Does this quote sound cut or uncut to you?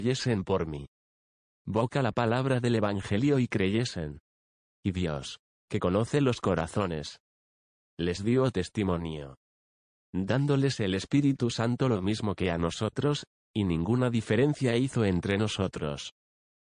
uncut